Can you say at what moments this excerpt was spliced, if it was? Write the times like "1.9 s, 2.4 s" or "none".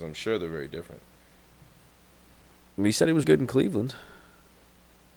3.2 s